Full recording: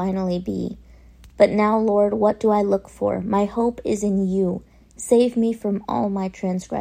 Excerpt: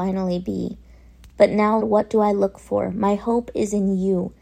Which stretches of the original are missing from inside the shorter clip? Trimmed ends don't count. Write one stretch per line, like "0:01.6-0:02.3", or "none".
0:01.8-0:02.1